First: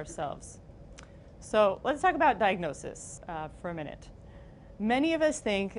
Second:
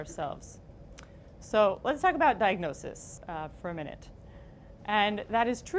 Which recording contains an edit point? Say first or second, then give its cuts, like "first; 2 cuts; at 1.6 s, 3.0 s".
second; 1 cut; at 4.8 s